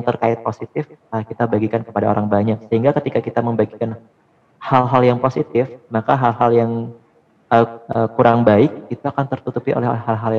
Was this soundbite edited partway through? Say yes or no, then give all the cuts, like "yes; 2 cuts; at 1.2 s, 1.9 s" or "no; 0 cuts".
yes; 1 cut; at 7.9 s